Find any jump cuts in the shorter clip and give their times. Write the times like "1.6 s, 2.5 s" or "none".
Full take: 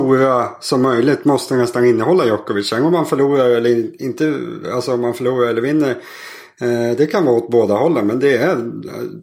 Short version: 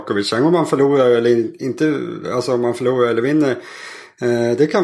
none